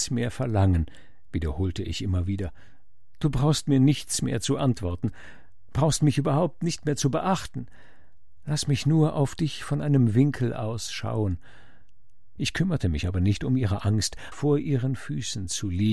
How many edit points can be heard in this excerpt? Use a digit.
2